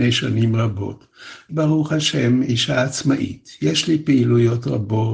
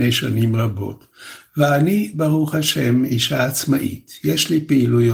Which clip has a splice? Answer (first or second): first